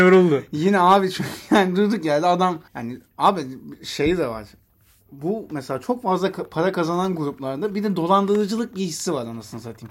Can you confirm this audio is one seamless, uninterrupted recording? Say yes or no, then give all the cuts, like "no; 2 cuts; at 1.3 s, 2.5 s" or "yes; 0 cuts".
no; 1 cut; at 2.7 s